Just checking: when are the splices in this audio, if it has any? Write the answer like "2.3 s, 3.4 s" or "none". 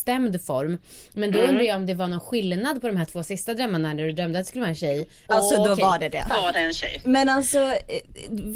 5.3 s, 6.3 s